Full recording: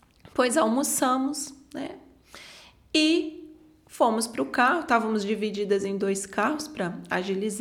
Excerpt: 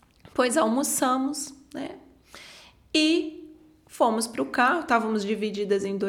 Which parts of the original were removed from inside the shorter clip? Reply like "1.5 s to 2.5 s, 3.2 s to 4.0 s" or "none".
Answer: none